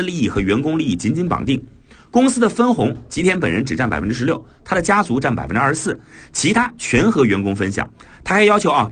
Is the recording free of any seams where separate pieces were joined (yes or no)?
yes